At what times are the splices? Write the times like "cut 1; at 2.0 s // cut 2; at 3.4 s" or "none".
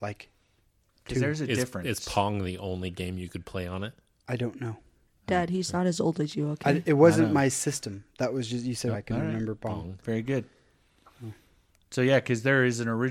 cut 1; at 8.9 s